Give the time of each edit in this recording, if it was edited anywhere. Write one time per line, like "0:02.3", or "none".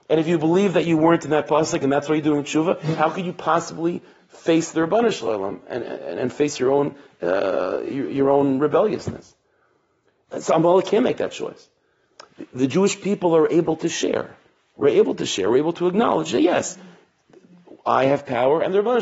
0:05.9